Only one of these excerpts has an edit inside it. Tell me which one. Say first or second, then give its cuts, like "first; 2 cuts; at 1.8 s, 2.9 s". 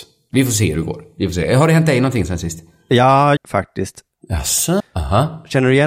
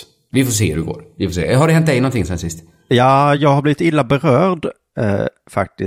first; 2 cuts; at 3.4 s, 4.8 s